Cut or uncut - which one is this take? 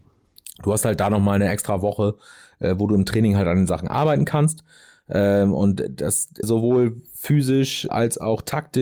cut